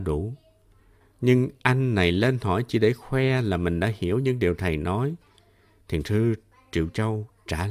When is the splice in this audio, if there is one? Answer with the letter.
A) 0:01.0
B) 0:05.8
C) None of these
A